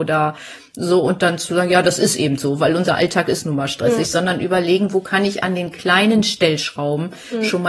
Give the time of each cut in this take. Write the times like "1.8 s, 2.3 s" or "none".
none